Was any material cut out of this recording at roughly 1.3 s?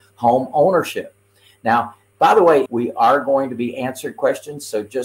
no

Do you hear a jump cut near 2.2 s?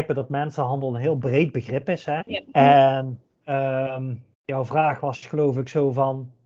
yes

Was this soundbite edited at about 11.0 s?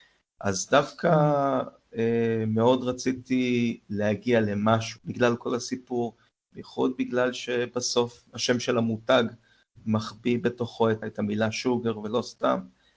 yes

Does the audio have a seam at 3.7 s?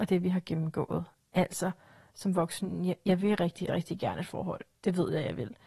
yes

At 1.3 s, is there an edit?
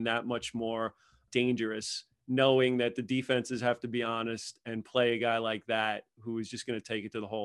yes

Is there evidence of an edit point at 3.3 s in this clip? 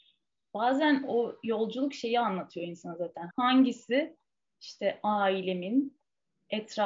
yes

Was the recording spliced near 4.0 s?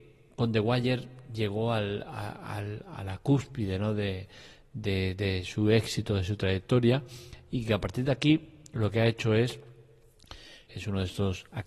no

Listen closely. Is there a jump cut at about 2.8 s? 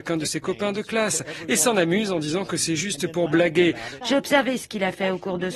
no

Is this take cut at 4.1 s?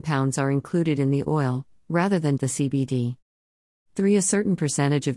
no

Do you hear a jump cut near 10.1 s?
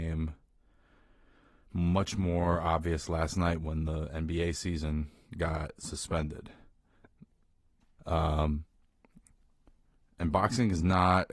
no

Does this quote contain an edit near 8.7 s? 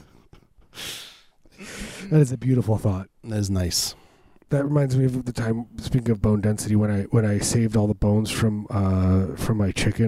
no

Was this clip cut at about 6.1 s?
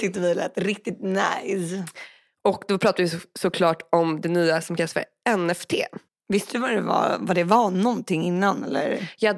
yes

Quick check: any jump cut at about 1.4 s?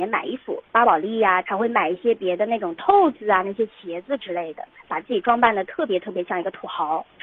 yes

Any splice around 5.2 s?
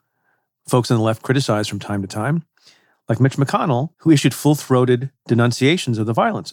yes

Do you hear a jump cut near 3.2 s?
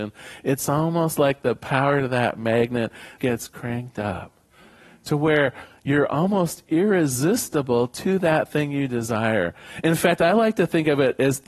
yes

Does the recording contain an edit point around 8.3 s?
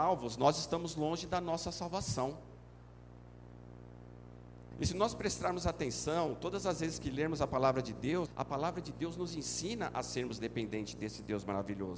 yes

